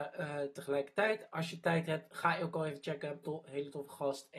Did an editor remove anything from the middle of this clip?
yes; 1 cut; at 3.2 s

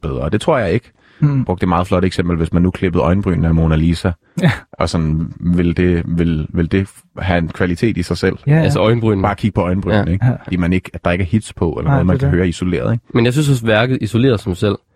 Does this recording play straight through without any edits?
no; 1 cut; at 10.5 s

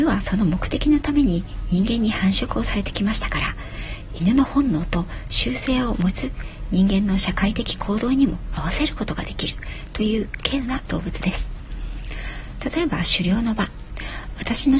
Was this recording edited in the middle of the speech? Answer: yes; 1 cut; at 6.1 s

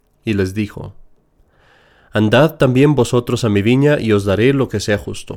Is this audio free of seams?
yes; 0 cuts

